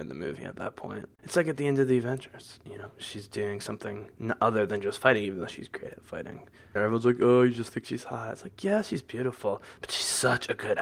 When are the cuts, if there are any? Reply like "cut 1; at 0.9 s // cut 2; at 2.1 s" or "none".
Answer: cut 1; at 1.1 s // cut 2; at 6.8 s